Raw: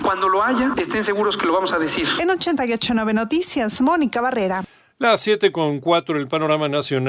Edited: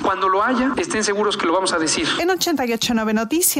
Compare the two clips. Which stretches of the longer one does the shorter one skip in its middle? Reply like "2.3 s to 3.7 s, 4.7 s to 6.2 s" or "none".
none